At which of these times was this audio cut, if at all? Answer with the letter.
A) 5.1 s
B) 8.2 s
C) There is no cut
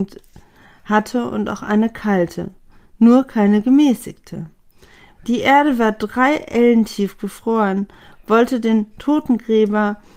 A